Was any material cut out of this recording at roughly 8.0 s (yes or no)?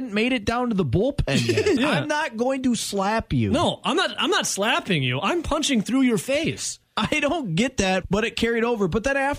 yes